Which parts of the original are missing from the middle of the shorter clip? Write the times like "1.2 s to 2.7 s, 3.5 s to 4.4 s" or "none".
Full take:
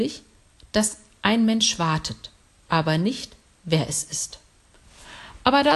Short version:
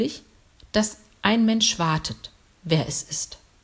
2.5 s to 3.5 s